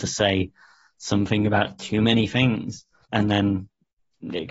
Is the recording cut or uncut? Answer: cut